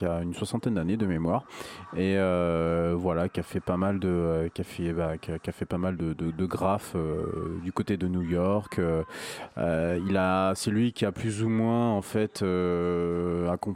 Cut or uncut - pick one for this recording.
uncut